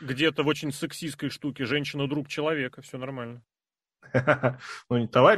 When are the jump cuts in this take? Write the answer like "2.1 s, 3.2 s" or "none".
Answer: none